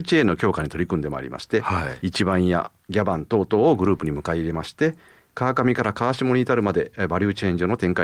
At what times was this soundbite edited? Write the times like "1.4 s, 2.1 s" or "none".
none